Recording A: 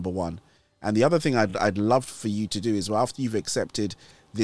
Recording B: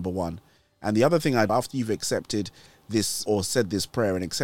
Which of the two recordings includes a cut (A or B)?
B